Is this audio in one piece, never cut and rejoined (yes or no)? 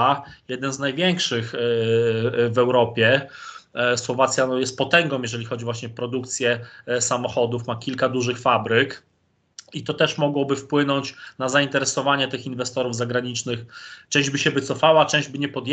yes